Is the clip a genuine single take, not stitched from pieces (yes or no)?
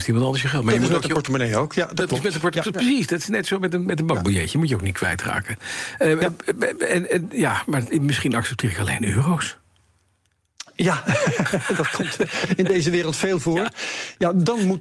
yes